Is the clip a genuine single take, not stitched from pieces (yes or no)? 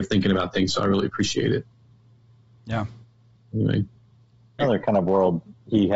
no